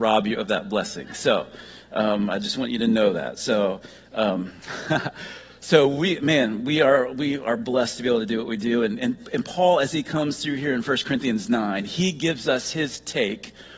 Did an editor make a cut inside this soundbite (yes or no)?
no